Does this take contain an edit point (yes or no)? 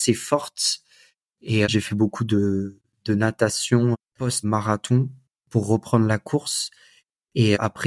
yes